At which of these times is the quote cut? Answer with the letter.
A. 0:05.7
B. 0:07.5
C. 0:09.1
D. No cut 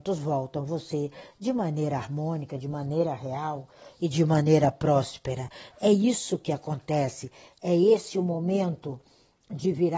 D